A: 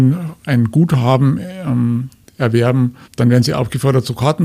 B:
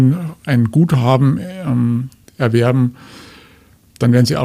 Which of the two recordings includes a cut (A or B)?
A